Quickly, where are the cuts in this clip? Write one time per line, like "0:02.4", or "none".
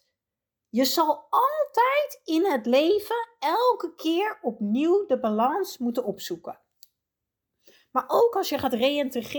none